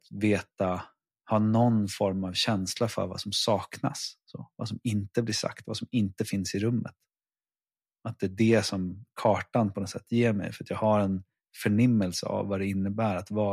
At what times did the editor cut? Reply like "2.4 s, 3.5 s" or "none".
none